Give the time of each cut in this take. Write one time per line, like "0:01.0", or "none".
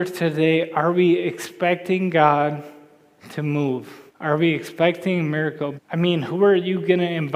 0:04.1
0:05.8